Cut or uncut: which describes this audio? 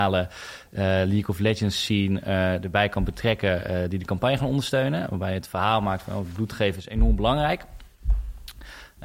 uncut